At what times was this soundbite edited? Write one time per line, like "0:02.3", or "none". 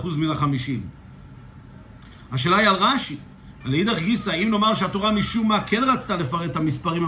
0:03.6